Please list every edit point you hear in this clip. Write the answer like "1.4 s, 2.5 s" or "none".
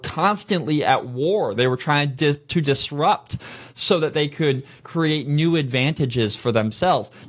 1.6 s